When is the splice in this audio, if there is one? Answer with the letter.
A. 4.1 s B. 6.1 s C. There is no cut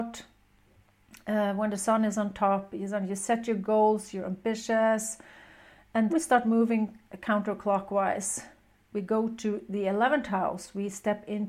B